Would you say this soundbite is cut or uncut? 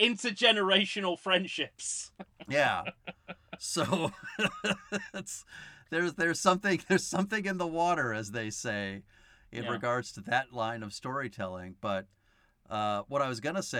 uncut